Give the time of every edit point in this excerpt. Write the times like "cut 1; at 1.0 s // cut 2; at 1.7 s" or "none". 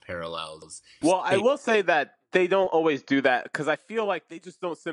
cut 1; at 1.0 s